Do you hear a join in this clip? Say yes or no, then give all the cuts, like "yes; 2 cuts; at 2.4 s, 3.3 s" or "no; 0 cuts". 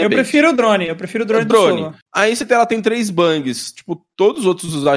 yes; 1 cut; at 2.0 s